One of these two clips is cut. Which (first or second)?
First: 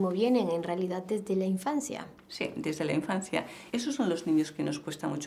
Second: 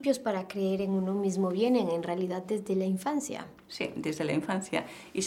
first